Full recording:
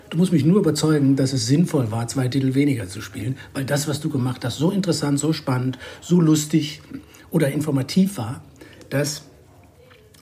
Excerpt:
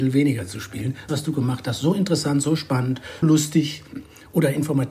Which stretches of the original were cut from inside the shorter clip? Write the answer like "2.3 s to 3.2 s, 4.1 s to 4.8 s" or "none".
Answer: 3.5 s to 3.9 s, 6.0 s to 6.2 s